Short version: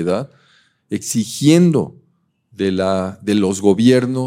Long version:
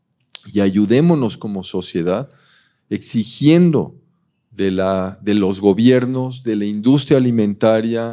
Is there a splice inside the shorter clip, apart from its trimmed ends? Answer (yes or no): no